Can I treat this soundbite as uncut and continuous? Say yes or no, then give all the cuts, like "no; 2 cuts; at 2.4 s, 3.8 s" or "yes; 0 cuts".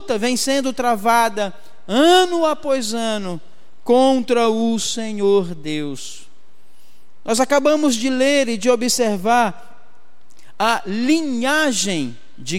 yes; 0 cuts